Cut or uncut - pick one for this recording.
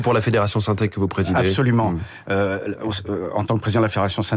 uncut